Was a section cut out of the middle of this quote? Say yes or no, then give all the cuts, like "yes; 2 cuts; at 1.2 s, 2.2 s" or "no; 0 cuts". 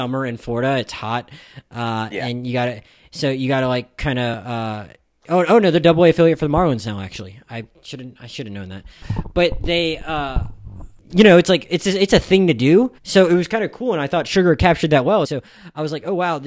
yes; 2 cuts; at 13.0 s, 15.2 s